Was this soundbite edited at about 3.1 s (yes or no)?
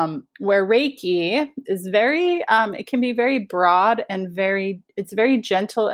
no